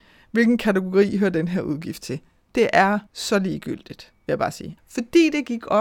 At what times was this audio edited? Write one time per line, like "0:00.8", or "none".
0:03.1
0:04.8